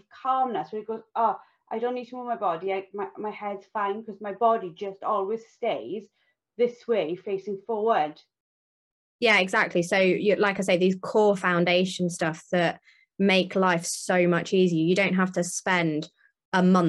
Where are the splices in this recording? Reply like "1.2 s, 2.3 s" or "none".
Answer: none